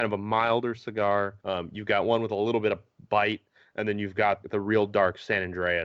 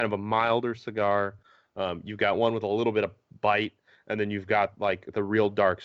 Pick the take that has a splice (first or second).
first